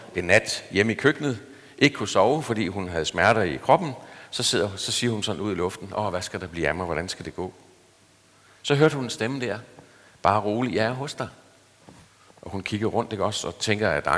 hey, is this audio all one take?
yes; 0 cuts

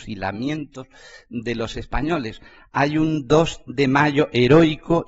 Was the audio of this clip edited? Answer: no; 0 cuts

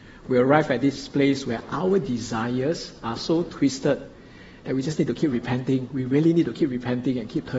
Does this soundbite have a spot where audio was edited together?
no; 0 cuts

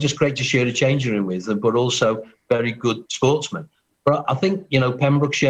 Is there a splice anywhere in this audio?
yes; 1 cut; at 3.1 s

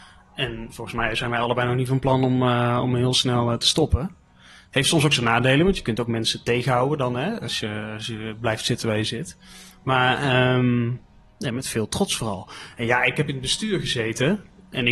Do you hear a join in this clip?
no; 0 cuts

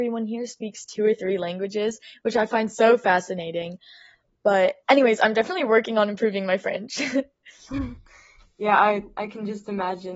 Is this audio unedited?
yes; 0 cuts

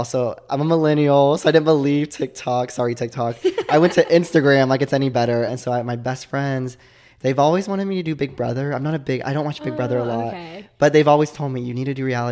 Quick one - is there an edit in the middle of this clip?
yes; 1 cut; at 5.5 s

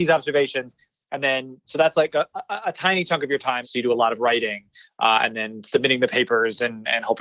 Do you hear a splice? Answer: yes; 2 cuts; at 1.6 s, 3.6 s

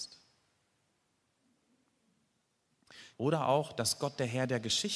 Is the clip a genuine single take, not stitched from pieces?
no; 1 cut; at 3.1 s

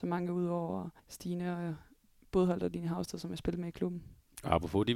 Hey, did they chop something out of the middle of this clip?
yes; 1 cut; at 1.0 s

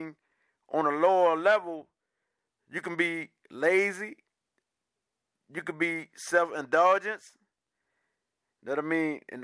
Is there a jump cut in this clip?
no; 0 cuts

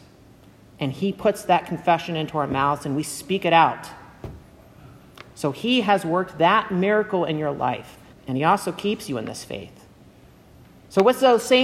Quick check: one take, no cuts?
no; 1 cut; at 8.1 s

